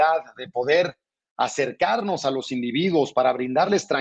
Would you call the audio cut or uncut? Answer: uncut